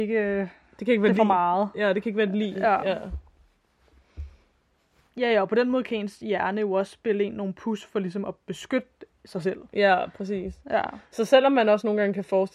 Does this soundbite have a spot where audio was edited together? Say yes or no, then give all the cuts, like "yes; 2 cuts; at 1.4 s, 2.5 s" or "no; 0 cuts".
no; 0 cuts